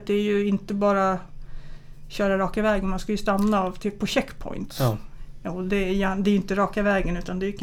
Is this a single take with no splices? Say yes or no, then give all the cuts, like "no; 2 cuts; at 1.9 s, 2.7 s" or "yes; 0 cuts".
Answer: yes; 0 cuts